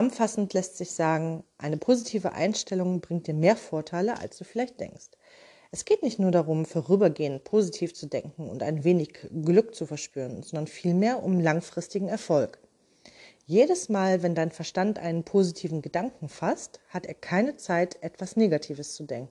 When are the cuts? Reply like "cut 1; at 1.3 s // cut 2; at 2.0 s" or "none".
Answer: none